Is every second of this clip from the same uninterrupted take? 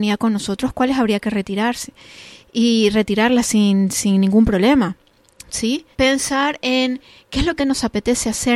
no; 2 cuts; at 5.9 s, 7.6 s

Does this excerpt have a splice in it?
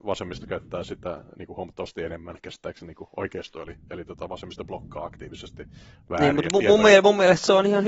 no; 0 cuts

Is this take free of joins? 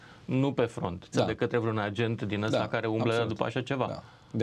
no; 1 cut; at 1.1 s

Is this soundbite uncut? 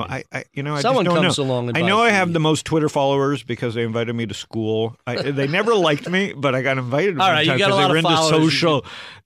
yes; 0 cuts

